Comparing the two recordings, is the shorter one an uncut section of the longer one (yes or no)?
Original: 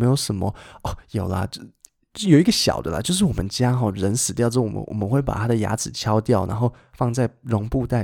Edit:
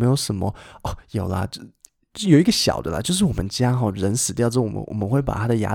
yes